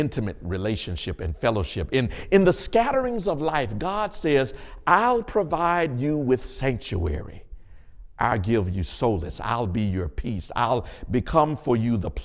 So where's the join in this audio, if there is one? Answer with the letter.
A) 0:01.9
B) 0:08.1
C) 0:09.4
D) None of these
D